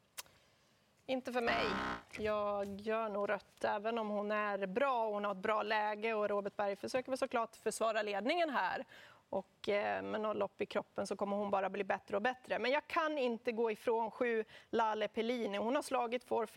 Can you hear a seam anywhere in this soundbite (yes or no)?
no